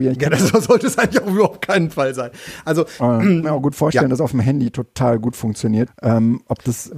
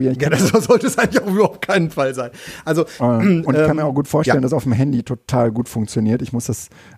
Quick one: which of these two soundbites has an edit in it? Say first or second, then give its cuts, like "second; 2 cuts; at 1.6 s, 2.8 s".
first; 2 cuts; at 3.4 s, 5.9 s